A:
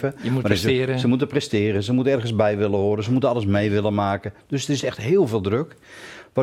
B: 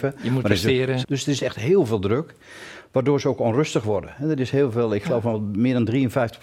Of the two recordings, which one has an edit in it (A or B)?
B